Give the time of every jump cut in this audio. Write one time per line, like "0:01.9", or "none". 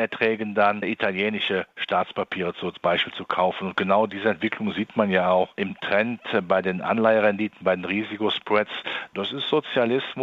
0:09.1